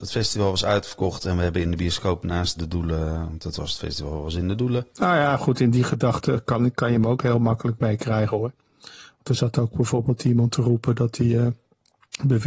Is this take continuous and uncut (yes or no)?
no